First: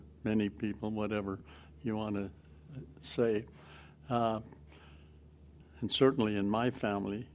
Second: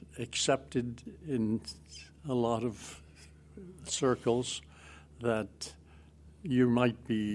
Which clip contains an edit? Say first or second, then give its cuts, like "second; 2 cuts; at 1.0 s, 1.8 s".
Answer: first; 1 cut; at 5.6 s